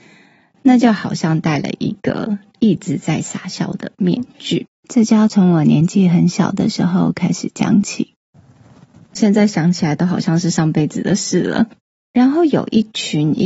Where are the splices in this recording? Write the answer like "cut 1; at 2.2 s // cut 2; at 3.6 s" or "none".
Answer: cut 1; at 9.1 s